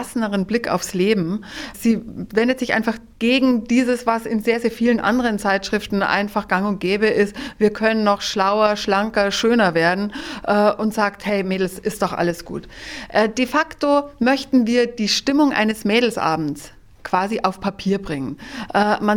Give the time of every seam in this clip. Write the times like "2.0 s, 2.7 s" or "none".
none